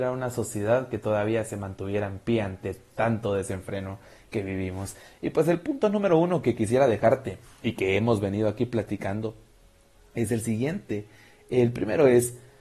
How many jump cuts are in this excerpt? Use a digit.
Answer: 0